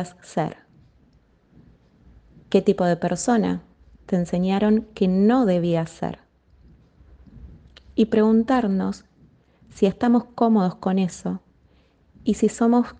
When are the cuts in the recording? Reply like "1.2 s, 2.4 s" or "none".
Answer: none